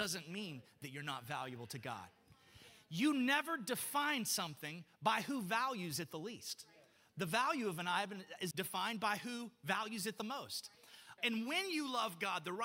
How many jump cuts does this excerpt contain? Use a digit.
2